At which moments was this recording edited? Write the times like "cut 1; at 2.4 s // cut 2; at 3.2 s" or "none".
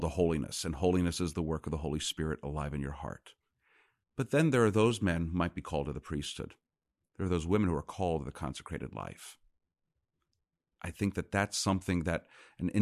none